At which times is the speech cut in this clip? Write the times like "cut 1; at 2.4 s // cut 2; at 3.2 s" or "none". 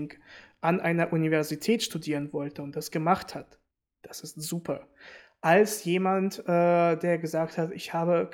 none